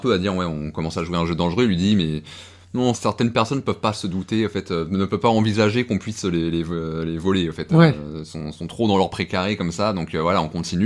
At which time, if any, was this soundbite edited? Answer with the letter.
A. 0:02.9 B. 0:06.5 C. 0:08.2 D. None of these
A